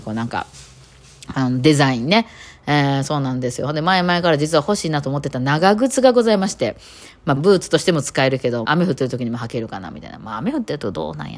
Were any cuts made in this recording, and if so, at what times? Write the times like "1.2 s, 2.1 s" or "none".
7.4 s, 8.7 s